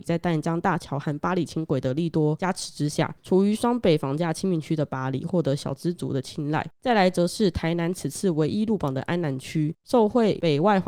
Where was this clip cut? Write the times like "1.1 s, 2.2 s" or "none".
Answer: none